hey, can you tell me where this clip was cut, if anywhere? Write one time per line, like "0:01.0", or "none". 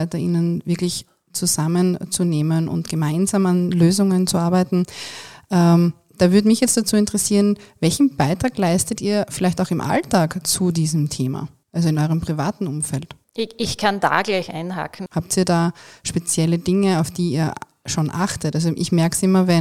0:13.2
0:15.1